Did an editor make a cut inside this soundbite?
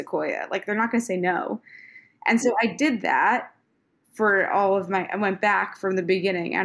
no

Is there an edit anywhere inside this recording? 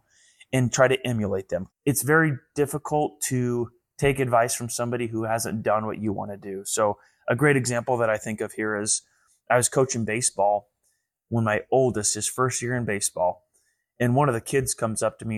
yes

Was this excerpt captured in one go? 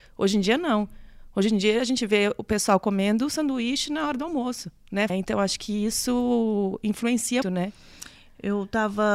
no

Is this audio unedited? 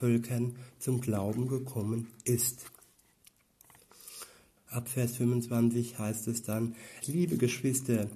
no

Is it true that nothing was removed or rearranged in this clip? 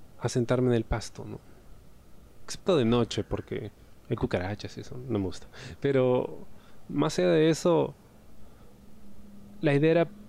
yes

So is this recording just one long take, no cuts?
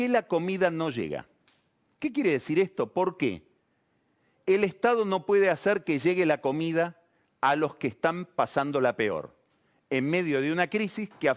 yes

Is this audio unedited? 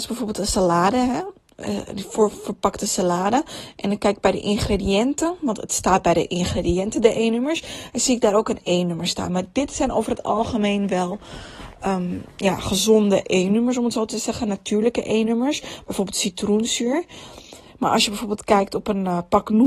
yes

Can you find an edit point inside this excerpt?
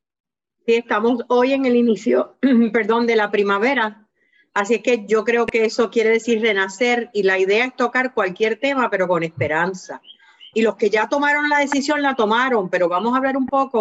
yes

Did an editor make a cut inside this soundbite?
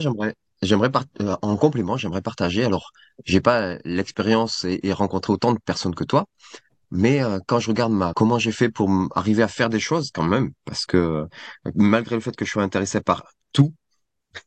yes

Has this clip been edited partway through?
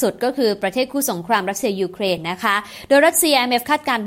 no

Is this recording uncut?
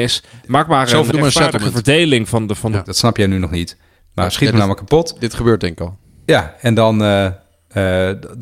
no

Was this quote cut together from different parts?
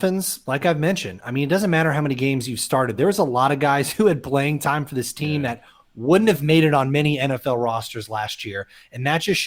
no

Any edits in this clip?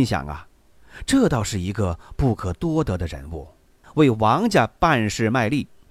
yes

